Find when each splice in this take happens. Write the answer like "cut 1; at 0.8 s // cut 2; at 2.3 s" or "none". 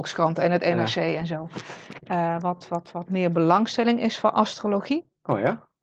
none